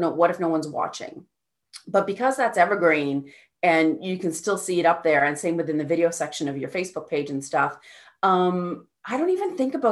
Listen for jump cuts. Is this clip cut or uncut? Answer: uncut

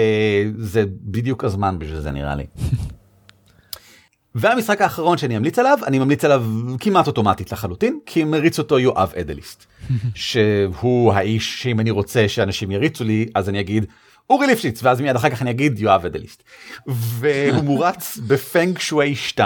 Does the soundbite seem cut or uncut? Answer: uncut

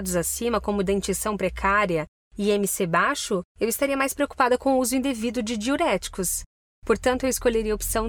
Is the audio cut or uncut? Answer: cut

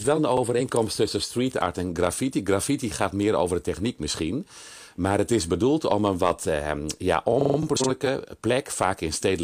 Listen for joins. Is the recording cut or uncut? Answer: uncut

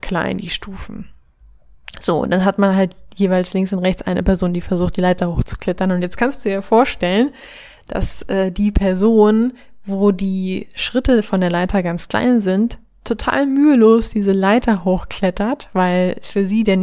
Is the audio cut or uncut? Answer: uncut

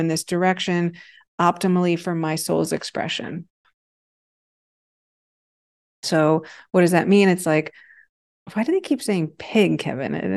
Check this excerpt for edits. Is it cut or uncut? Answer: uncut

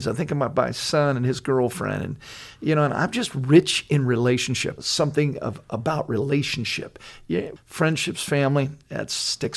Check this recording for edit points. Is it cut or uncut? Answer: cut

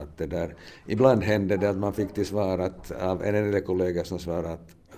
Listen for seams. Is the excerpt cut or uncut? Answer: uncut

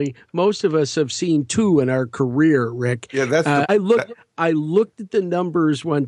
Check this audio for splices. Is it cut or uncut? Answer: cut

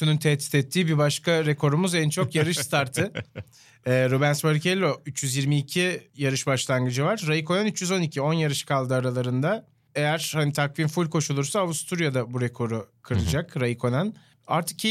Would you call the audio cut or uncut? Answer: uncut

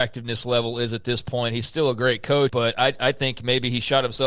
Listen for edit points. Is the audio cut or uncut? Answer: cut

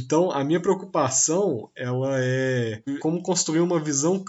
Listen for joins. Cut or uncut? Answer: cut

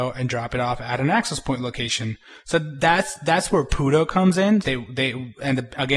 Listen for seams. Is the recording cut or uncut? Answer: cut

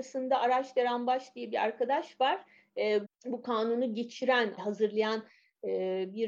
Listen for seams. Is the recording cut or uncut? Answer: cut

